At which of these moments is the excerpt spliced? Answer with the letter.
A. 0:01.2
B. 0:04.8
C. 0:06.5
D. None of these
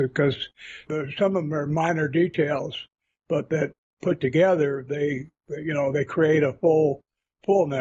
D